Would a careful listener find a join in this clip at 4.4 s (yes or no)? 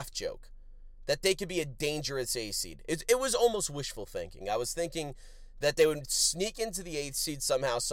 yes